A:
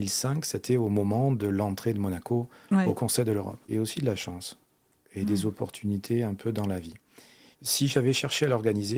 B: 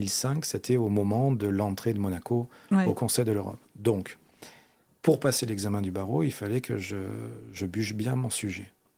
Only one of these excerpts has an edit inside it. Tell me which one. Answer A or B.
A